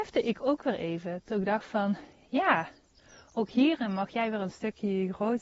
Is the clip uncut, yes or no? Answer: yes